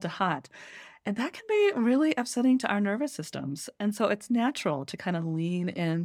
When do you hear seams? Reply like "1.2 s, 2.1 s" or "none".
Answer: none